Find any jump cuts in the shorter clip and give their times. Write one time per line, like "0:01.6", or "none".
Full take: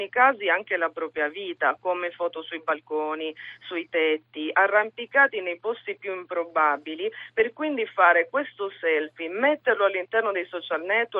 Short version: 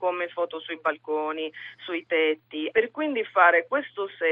0:02.7